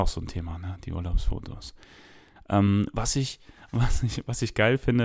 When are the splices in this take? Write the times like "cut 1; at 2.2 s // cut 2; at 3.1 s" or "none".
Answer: cut 1; at 2.4 s